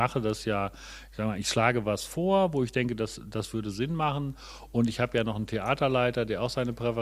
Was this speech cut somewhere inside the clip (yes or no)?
no